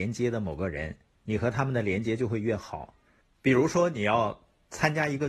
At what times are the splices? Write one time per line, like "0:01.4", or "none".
0:03.2